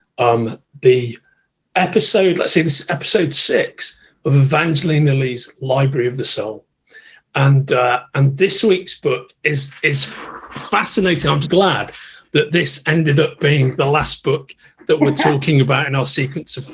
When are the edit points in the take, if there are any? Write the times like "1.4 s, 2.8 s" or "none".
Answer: 11.4 s